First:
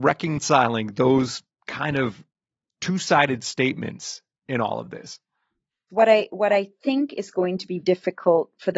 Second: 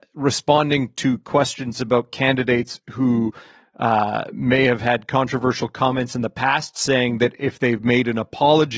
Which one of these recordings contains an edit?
first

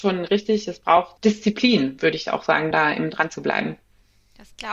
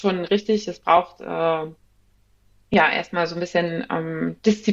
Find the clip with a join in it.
first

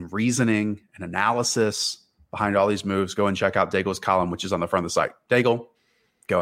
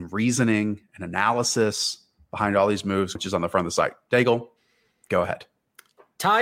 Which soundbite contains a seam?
second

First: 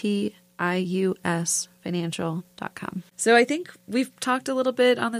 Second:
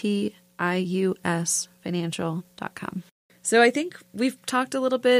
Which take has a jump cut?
first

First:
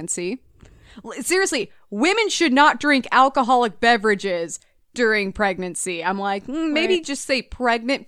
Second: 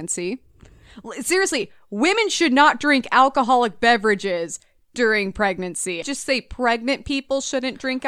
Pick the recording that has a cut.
second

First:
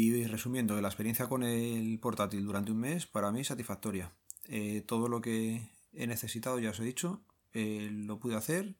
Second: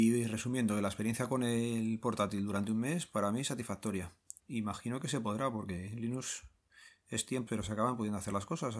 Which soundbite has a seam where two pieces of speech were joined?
second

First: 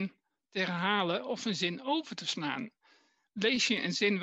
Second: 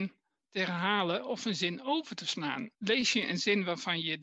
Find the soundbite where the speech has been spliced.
second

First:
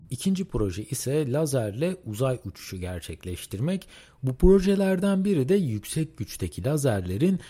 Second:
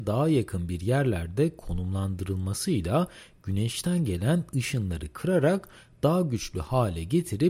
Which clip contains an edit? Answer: first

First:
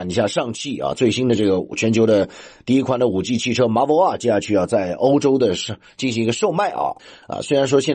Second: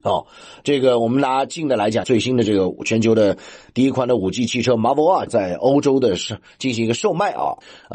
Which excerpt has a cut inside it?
second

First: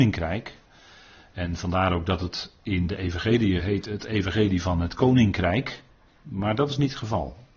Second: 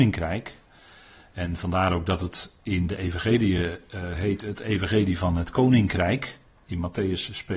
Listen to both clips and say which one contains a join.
first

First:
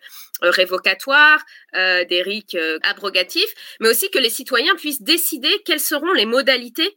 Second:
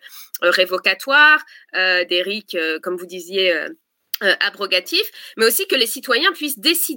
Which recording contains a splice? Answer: first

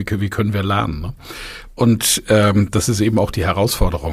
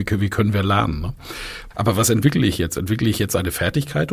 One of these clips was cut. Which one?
second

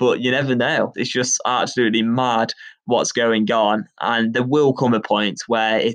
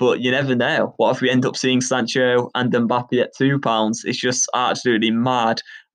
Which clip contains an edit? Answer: first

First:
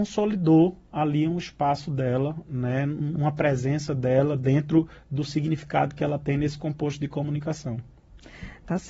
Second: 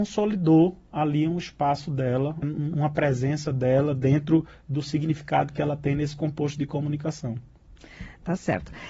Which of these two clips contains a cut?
second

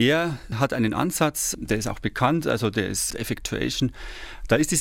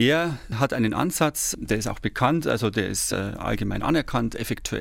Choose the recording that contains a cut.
first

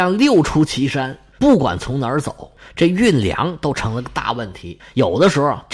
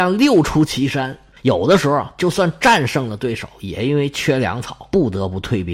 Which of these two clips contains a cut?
second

